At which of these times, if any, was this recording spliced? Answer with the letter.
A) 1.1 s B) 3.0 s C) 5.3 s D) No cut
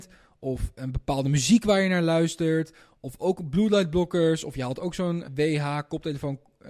C